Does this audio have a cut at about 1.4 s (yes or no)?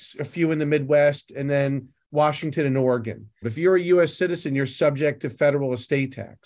no